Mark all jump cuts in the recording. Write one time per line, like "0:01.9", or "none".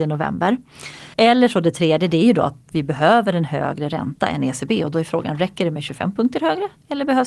0:01.1

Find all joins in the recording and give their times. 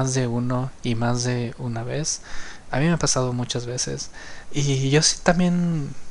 0:04.4

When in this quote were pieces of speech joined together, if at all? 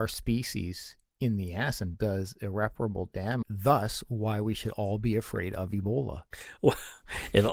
0:03.4

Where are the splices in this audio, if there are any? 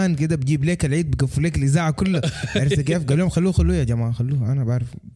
none

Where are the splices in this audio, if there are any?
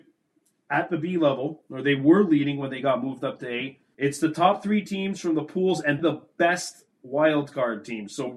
0:03.9
0:06.0

